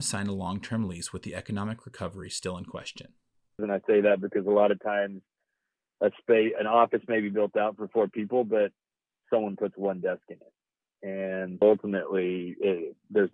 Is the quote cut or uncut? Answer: cut